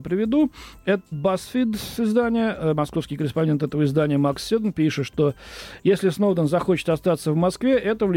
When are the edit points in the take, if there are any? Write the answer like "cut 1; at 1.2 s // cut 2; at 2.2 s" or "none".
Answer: cut 1; at 1.1 s

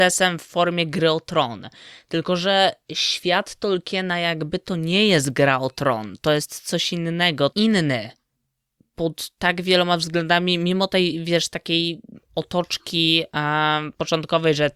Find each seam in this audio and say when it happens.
cut 1; at 7.5 s

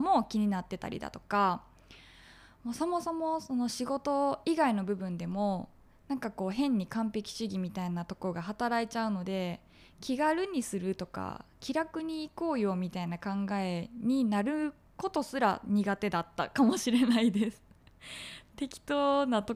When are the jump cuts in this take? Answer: none

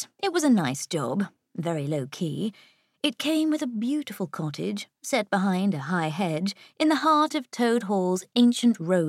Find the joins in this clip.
none

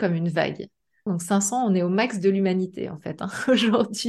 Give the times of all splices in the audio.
cut 1; at 1.1 s

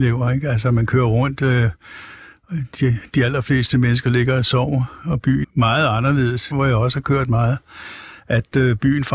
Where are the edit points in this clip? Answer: cut 1; at 5.4 s // cut 2; at 6.5 s

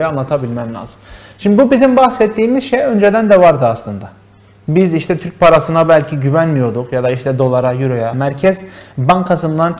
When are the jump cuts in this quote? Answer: cut 1; at 8.1 s

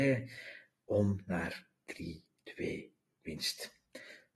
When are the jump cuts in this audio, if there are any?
none

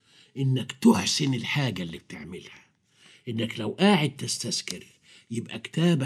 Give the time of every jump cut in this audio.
none

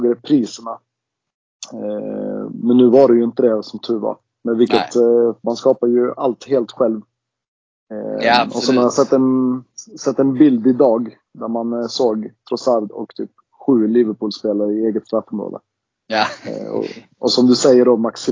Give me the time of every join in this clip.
cut 1; at 5.4 s

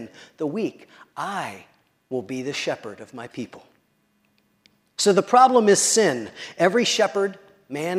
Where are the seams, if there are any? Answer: none

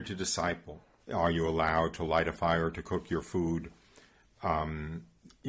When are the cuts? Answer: cut 1; at 1.0 s

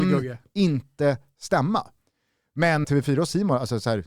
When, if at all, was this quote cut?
cut 1; at 2.8 s

